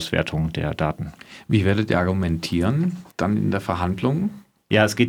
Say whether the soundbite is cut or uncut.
cut